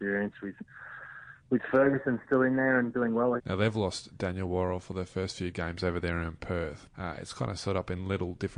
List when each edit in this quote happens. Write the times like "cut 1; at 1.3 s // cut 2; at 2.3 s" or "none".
cut 1; at 3.4 s // cut 2; at 6.9 s